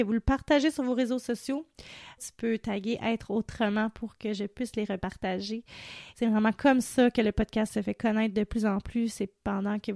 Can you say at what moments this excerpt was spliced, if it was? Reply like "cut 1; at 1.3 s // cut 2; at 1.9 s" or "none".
cut 1; at 2.2 s // cut 2; at 6.1 s